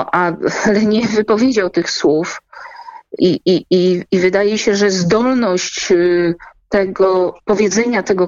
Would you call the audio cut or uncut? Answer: cut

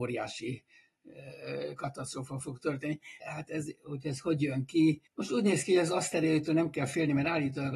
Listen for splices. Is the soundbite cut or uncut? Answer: cut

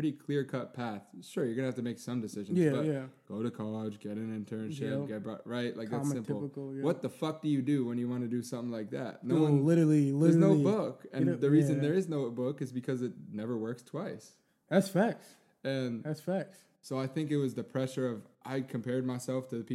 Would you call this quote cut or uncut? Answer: uncut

